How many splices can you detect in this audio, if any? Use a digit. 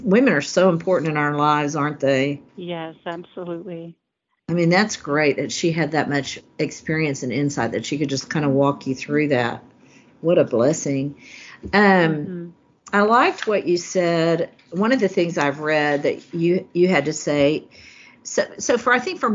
1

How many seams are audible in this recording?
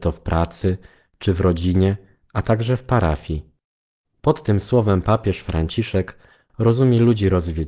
1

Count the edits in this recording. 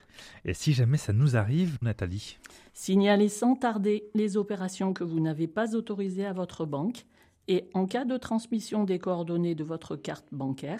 1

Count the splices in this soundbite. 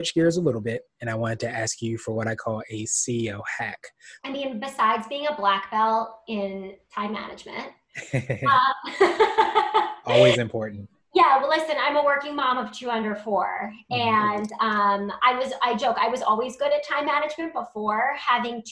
1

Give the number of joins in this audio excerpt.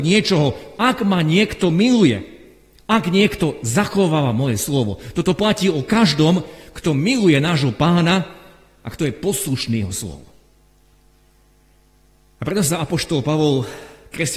0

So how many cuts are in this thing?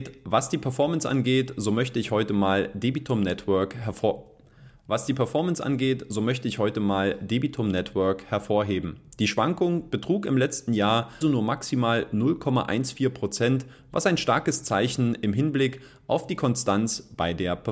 2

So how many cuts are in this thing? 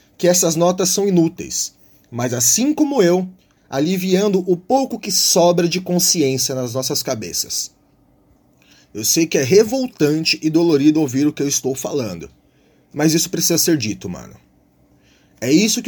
1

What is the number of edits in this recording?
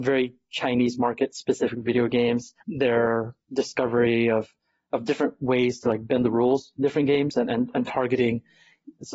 1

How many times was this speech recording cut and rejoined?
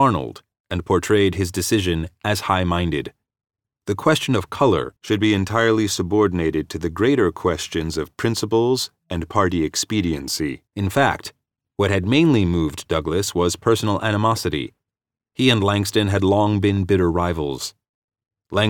2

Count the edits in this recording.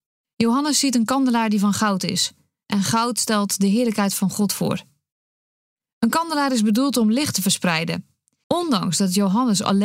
1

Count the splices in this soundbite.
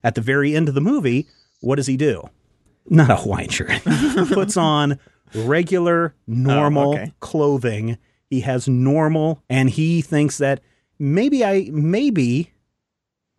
3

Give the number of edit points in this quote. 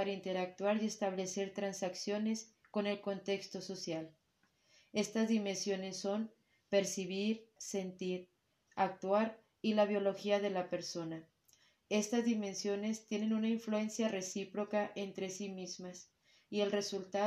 1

